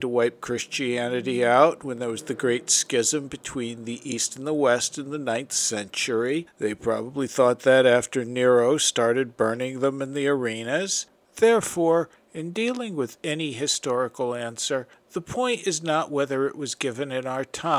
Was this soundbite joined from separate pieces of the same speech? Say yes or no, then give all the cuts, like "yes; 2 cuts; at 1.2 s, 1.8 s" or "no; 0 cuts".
yes; 2 cuts; at 6.5 s, 11.1 s